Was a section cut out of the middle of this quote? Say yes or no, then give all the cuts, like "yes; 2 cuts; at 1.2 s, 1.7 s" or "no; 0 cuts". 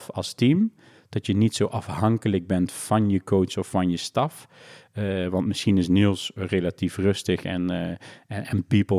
no; 0 cuts